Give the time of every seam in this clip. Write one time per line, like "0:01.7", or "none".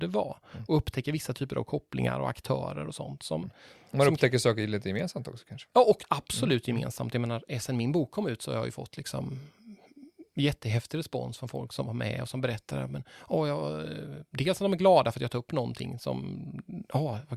none